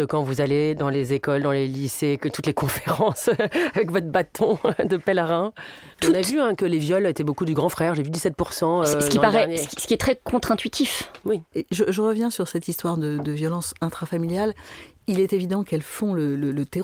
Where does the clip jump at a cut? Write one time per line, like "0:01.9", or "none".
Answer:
0:05.9
0:11.5